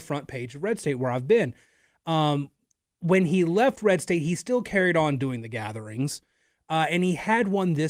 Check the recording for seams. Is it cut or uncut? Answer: uncut